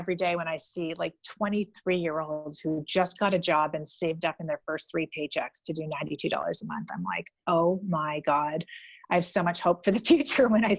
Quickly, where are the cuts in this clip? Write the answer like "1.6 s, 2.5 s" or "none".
none